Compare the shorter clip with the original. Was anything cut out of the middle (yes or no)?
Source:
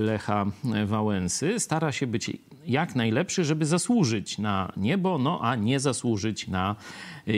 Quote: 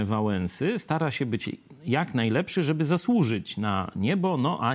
no